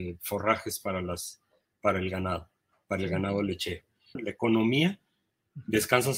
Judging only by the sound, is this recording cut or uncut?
cut